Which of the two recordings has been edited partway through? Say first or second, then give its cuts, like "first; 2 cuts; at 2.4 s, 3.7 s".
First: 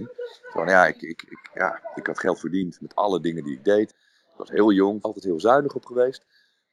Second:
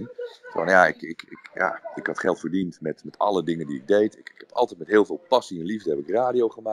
first; 3 cuts; at 2.8 s, 3.9 s, 5.0 s